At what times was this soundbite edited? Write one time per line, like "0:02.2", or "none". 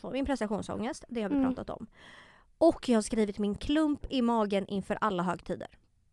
none